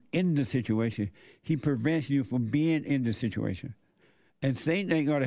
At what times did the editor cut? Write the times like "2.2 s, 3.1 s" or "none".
4.3 s

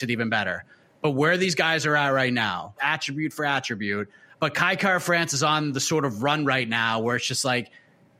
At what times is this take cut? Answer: 2.8 s, 4.4 s

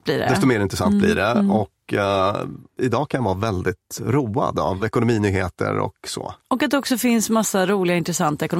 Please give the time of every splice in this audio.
none

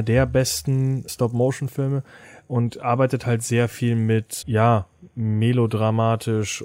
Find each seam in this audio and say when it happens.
1.1 s, 4.4 s

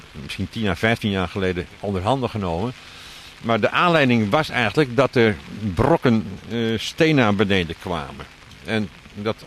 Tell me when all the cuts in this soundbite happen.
none

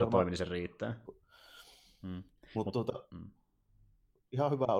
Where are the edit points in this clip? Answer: 1.1 s

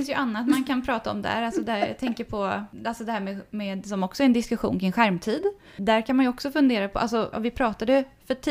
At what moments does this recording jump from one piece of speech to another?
7.3 s

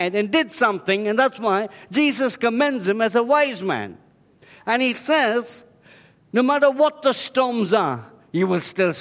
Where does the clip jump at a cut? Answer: 6.2 s

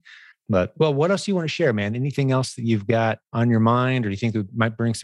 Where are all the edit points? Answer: 3.3 s

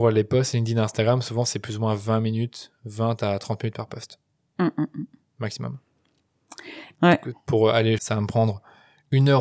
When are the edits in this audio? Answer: 6.9 s, 8.0 s

